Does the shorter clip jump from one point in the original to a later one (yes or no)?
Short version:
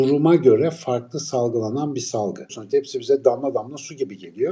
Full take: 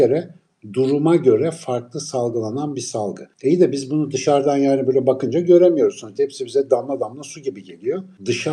yes